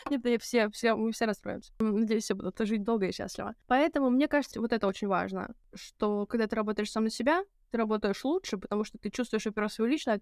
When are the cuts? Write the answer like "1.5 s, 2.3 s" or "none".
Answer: 4.5 s